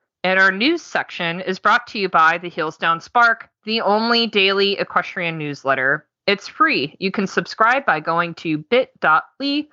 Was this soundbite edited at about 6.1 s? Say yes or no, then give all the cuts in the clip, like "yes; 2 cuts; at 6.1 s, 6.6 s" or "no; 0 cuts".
no; 0 cuts